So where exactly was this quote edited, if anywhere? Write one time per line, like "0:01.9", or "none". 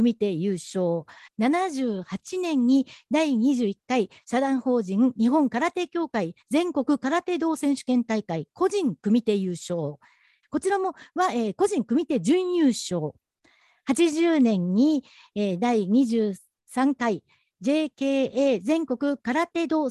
0:01.3
0:10.4

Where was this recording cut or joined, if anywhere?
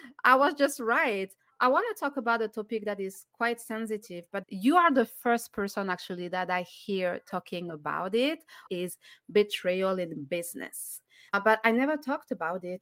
0:08.7
0:11.3

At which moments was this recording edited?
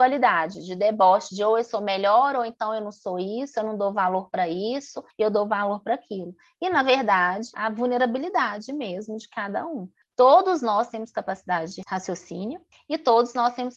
0:07.5

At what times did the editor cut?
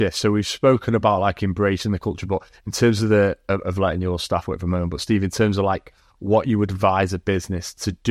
none

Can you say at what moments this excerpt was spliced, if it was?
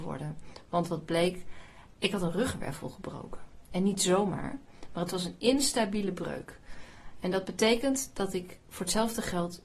none

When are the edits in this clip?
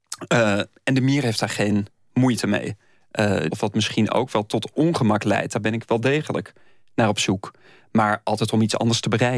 0:03.5

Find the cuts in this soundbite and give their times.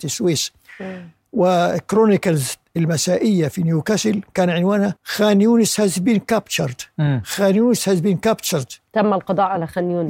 0:05.0

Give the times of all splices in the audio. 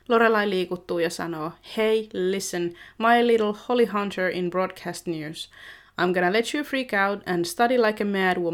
none

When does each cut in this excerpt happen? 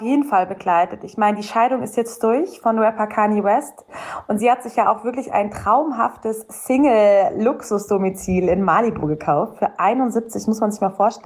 none

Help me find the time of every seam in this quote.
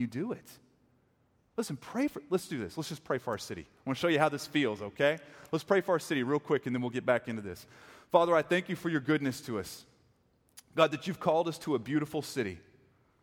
none

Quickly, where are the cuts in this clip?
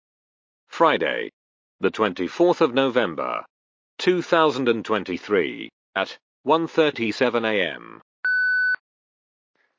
none

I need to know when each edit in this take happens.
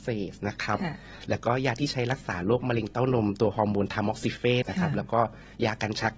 0:04.6

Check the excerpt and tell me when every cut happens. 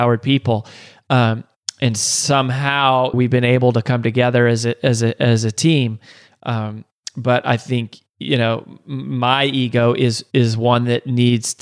0:03.1

